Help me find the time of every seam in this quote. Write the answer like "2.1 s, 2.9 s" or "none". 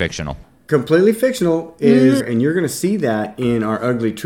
2.2 s